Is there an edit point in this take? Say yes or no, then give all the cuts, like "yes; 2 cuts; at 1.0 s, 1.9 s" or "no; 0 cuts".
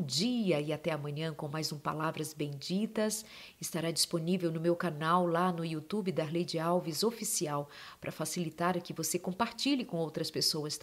no; 0 cuts